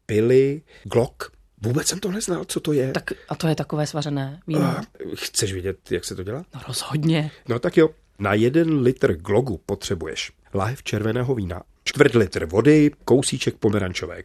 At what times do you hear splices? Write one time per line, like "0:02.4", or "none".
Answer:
0:11.8